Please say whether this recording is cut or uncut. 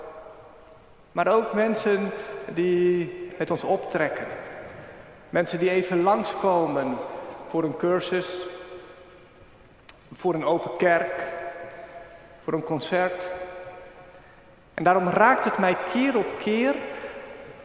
cut